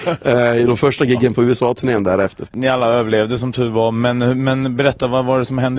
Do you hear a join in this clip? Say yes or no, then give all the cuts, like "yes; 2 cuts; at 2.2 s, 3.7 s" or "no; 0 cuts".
yes; 1 cut; at 2.5 s